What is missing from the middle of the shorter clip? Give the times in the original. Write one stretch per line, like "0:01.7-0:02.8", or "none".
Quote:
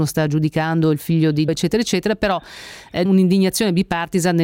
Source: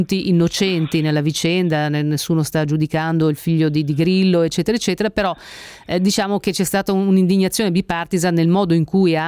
0:03.9-0:04.4
0:06.0-0:07.0